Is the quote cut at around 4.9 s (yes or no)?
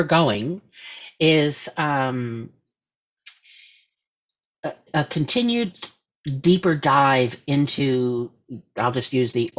yes